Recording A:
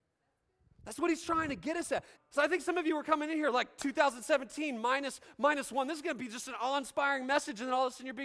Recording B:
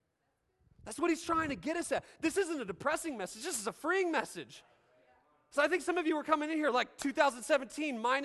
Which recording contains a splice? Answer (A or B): A